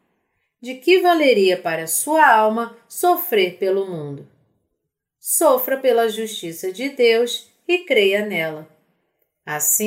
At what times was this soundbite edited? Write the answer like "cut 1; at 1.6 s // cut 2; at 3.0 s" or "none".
none